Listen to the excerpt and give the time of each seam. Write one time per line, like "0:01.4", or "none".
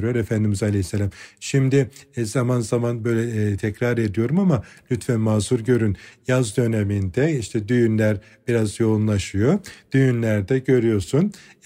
none